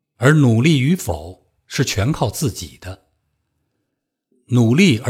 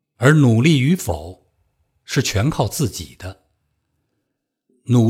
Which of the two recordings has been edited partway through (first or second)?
first